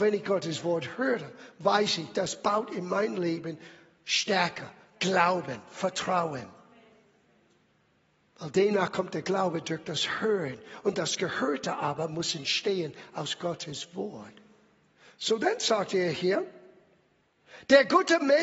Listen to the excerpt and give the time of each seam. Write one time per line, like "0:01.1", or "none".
none